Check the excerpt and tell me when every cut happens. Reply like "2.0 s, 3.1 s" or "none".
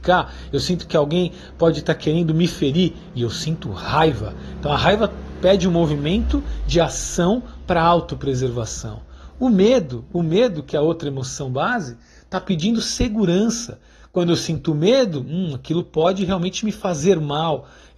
none